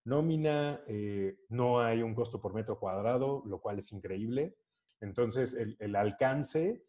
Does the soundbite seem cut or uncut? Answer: cut